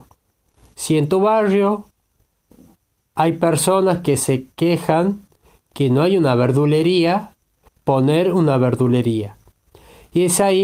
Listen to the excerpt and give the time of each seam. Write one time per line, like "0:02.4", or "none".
0:07.7